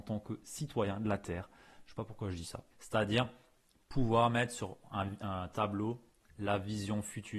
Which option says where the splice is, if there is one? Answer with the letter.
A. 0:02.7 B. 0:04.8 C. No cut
A